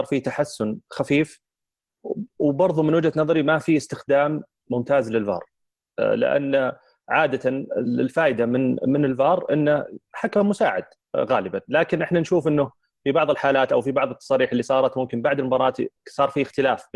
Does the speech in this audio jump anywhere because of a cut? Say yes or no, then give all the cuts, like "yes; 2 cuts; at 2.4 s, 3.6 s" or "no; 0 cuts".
no; 0 cuts